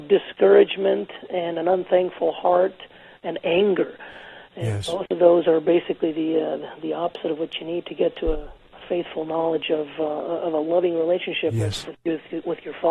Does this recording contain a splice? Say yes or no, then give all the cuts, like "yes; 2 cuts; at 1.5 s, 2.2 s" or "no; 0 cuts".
no; 0 cuts